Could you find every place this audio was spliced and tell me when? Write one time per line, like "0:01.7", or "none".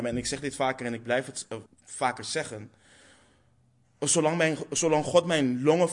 0:01.7